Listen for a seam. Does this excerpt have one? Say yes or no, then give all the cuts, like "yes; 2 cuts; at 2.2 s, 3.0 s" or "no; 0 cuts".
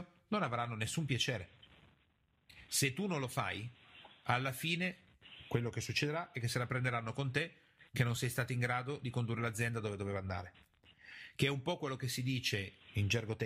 yes; 1 cut; at 2.7 s